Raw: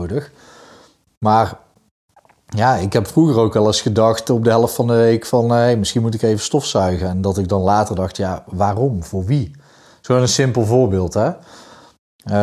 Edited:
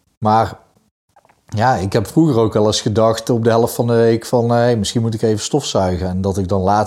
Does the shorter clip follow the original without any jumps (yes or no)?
yes